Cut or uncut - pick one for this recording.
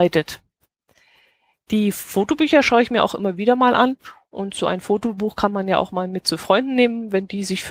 uncut